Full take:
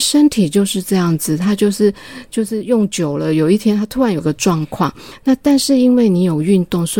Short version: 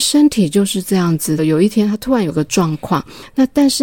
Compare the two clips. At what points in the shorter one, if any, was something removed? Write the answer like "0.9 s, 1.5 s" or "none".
1.4 s